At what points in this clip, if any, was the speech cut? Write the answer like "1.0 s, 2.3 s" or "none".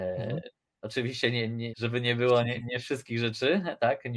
1.7 s